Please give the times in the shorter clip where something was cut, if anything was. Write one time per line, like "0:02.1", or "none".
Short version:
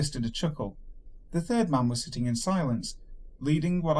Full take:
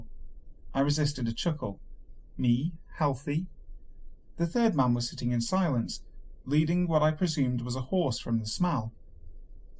0:01.3